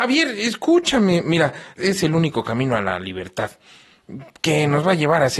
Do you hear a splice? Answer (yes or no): yes